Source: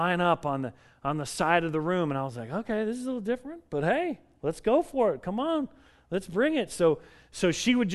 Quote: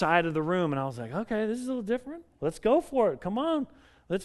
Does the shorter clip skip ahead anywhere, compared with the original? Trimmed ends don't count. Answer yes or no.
yes